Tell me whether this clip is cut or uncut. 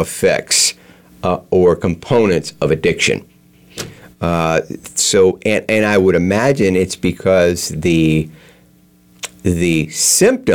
uncut